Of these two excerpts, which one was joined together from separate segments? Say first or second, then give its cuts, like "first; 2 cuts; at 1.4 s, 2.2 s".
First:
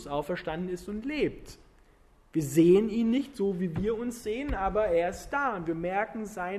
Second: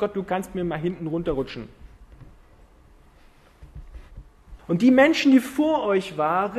second; 1 cut; at 4.6 s